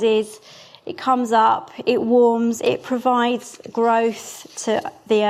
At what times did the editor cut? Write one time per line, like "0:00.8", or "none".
0:02.6